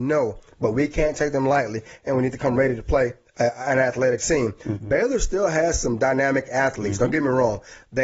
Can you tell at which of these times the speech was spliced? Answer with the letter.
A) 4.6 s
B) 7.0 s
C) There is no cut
A